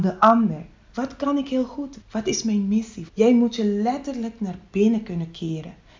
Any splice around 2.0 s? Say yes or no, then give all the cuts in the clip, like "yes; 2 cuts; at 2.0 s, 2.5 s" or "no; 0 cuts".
yes; 3 cuts; at 0.9 s, 2.0 s, 3.1 s